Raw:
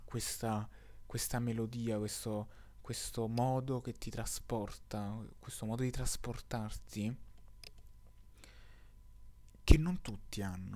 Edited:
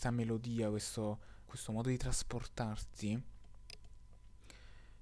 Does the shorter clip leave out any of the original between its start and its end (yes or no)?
yes